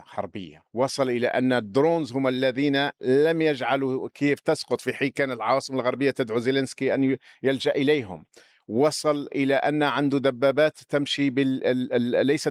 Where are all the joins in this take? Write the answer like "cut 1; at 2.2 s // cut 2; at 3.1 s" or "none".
none